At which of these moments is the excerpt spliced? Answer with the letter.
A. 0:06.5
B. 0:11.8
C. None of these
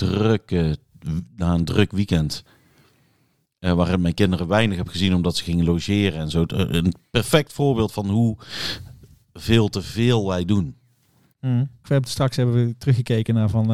B